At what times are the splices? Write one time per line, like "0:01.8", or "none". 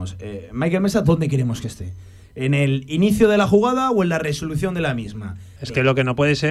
0:05.6